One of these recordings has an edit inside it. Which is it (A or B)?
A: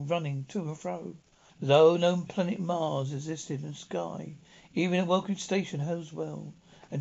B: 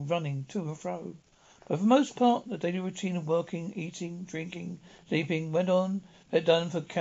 A